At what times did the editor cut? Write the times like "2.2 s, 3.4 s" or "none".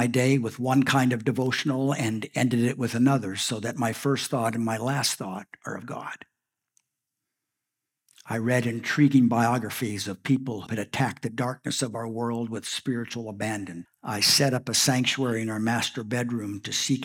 10.7 s, 13.9 s